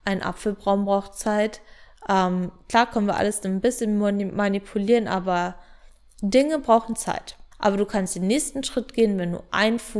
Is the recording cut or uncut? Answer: cut